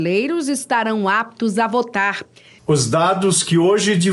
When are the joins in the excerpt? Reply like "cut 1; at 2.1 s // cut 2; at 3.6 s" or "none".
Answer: cut 1; at 2.6 s